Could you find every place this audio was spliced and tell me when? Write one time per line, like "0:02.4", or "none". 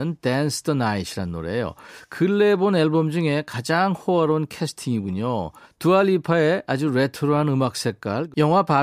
0:05.7